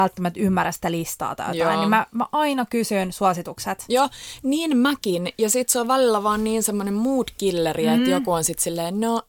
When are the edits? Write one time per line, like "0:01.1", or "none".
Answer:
none